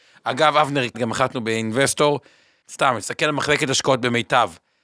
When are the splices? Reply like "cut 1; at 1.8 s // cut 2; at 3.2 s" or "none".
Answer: cut 1; at 0.9 s // cut 2; at 2.6 s